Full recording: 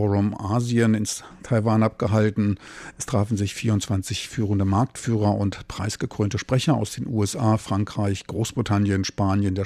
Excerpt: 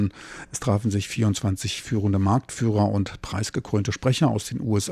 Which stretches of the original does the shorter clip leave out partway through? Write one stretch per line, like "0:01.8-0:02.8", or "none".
none